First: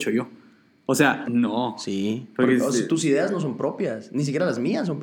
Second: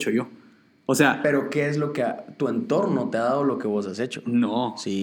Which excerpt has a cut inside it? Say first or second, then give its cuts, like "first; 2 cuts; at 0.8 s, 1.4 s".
first; 1 cut; at 1.2 s